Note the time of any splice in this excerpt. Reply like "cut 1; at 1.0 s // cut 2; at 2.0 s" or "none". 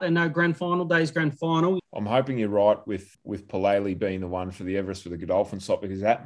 cut 1; at 1.8 s // cut 2; at 3.1 s